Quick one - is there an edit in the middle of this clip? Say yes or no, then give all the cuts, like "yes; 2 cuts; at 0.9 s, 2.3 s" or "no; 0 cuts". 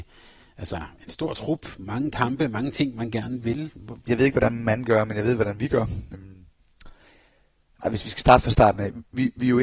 yes; 2 cuts; at 4.0 s, 6.1 s